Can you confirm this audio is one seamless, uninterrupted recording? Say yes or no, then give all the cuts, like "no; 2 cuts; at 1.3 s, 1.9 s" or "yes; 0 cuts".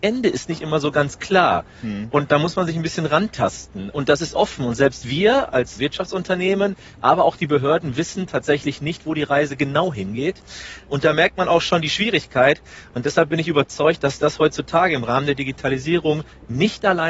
yes; 0 cuts